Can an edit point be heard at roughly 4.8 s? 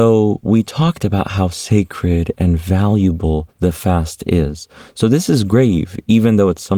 no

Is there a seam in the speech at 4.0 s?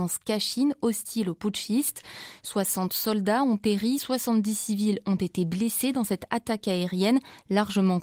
no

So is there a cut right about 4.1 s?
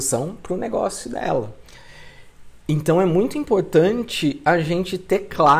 no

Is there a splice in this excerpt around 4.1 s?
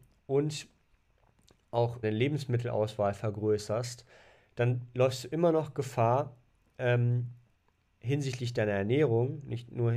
no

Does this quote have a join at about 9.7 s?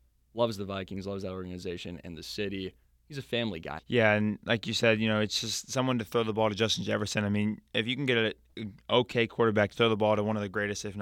yes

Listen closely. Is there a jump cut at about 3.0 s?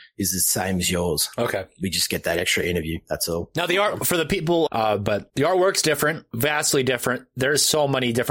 no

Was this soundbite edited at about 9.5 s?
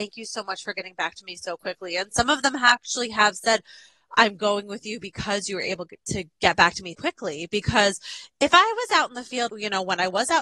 yes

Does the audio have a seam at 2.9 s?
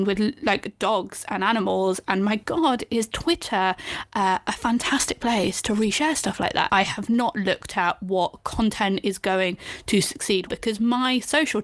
no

